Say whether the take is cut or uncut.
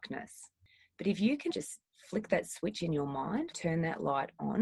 cut